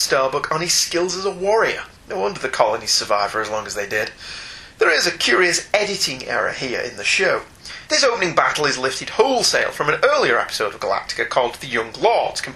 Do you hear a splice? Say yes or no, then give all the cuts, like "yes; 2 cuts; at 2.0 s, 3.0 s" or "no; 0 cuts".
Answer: yes; 2 cuts; at 2.0 s, 7.9 s